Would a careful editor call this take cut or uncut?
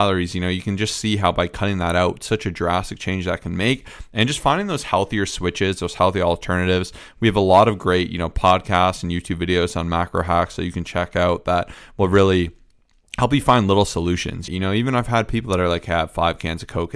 cut